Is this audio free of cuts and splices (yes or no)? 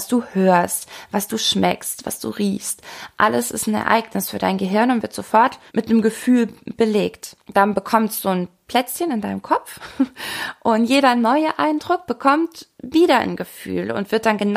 no